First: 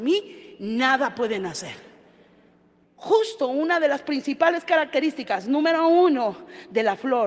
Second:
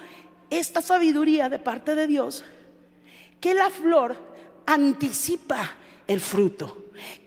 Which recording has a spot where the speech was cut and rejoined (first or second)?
first